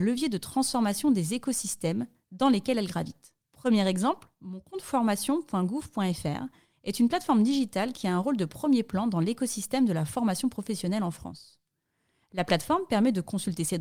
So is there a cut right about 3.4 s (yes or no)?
yes